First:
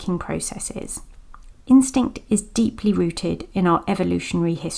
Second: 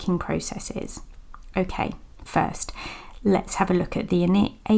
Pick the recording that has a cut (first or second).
first